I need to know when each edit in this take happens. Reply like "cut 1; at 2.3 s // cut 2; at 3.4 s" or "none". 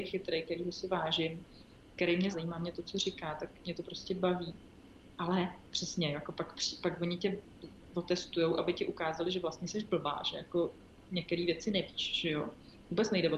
cut 1; at 2.3 s